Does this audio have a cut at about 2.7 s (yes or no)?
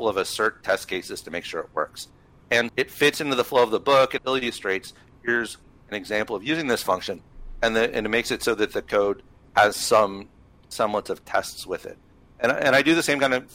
yes